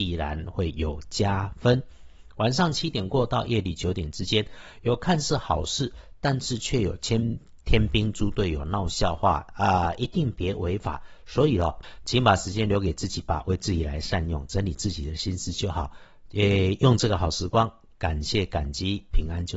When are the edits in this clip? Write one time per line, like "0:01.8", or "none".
none